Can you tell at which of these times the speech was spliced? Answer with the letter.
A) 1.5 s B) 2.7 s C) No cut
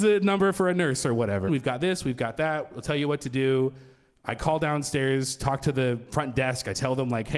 A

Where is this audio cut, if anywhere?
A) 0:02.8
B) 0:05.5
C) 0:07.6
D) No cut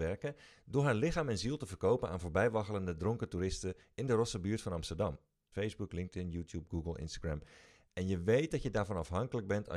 B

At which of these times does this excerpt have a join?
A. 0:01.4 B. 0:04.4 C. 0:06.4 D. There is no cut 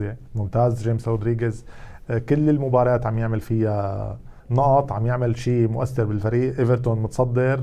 B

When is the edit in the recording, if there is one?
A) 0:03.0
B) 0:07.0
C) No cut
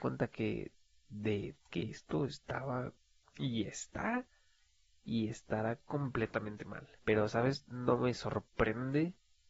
B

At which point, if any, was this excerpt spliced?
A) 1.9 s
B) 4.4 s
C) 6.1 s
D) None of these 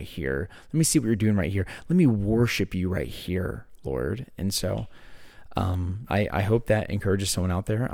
C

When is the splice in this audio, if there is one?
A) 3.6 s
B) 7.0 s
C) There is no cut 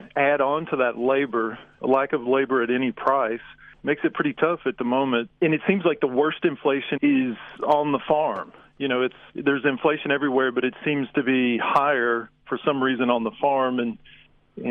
B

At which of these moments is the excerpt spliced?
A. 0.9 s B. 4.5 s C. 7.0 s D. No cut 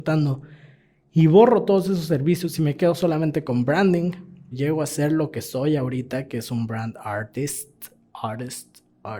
B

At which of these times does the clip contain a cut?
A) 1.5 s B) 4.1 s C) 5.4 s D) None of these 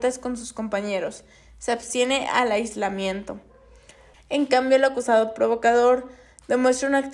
B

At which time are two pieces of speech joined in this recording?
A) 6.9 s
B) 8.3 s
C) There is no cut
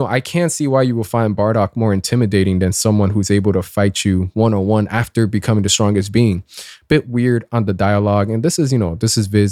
C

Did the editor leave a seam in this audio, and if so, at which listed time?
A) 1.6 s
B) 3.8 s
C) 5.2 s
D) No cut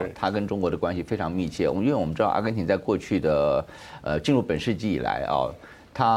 D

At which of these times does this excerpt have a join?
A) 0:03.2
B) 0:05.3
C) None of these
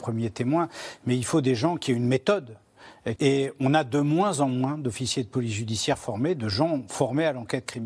A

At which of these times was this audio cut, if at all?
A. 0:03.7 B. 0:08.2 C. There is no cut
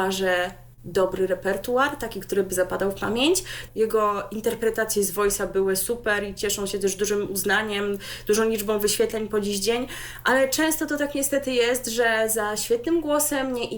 A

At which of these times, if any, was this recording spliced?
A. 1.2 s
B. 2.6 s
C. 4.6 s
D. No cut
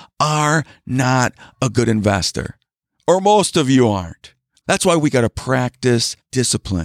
C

